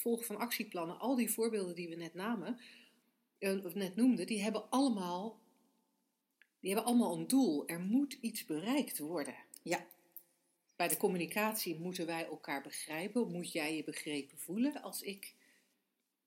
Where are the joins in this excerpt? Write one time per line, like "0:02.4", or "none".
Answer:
none

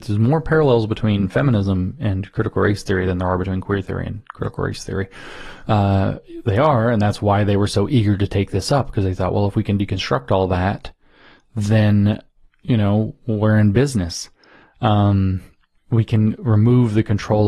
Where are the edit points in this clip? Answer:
0:15.8

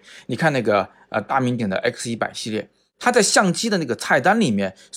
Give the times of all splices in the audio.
0:01.6

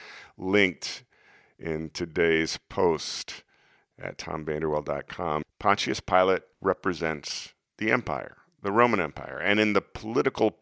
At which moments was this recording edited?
0:05.4
0:06.5

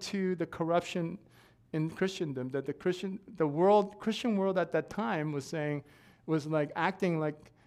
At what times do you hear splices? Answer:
none

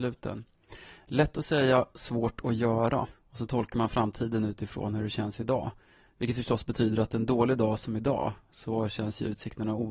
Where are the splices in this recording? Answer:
0:03.1

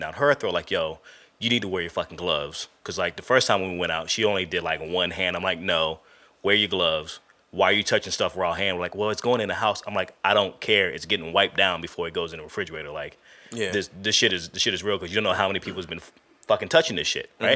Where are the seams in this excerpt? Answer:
none

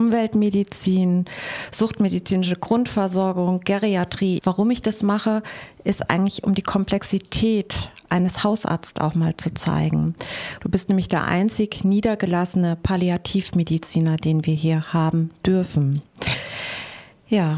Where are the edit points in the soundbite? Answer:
0:04.4
0:10.6

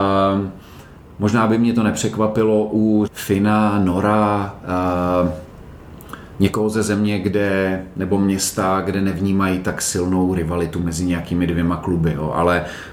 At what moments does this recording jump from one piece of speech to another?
0:03.1

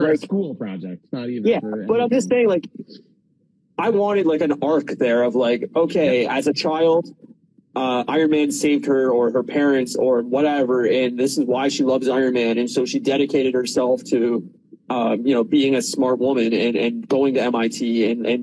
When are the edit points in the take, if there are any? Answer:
none

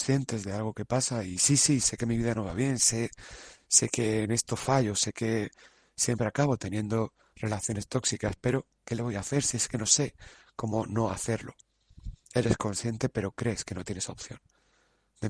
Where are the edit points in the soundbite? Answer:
none

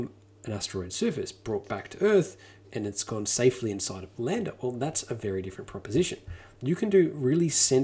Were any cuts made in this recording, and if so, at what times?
0:02.6

